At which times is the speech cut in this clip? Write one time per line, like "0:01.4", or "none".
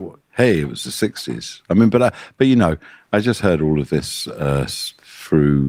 none